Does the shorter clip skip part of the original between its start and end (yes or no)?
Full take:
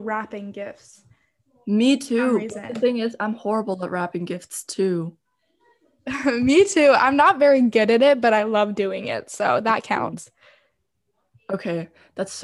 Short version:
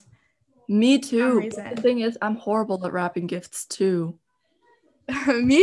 no